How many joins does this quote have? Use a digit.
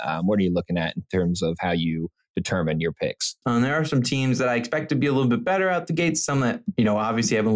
1